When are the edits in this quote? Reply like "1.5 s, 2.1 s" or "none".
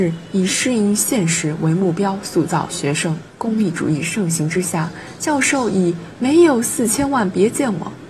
3.3 s